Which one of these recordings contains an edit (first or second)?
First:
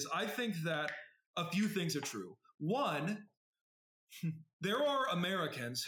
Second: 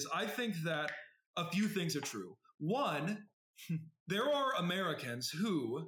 second